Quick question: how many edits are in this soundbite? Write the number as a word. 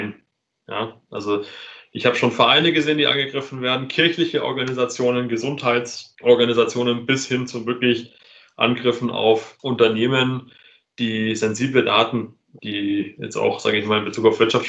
zero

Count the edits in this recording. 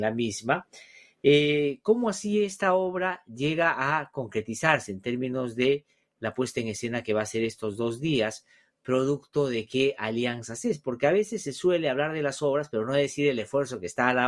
zero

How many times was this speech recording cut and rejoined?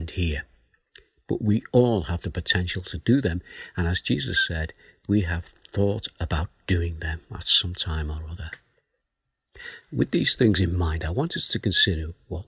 one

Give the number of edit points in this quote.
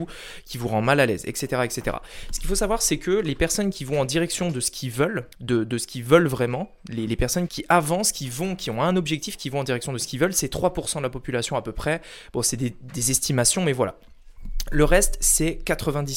two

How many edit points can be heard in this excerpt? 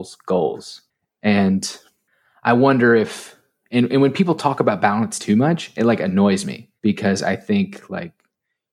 two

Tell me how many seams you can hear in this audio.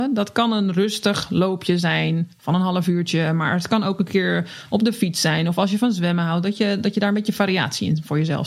zero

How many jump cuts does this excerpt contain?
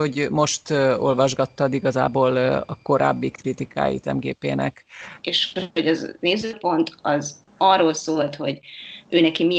one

